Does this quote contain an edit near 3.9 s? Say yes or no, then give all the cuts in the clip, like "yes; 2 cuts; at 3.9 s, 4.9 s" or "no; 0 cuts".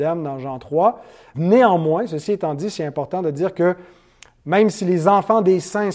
no; 1 cut; at 1.3 s